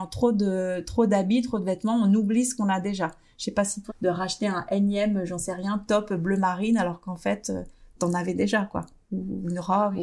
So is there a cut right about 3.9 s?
yes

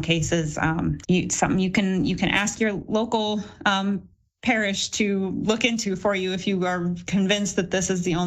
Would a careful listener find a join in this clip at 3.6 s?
no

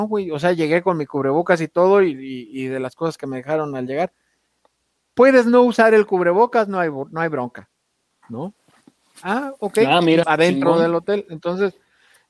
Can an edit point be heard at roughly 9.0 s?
no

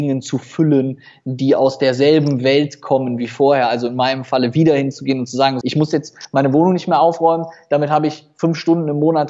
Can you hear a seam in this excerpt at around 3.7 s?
no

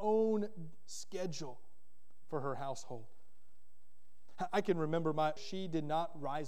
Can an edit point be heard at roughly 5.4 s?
yes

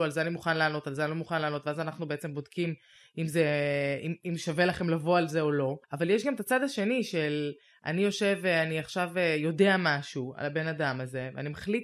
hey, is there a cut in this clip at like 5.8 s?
yes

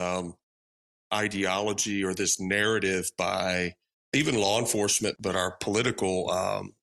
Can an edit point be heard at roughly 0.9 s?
no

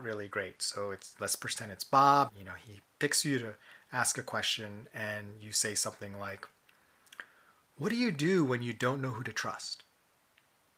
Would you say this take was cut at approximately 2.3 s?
yes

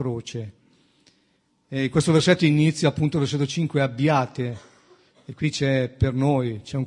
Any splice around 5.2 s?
no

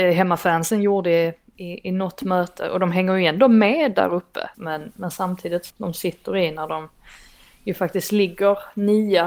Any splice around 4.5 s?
yes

